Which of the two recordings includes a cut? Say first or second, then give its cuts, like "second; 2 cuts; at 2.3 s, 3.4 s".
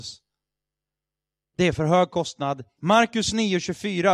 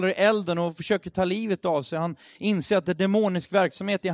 first; 2 cuts; at 1.4 s, 2.8 s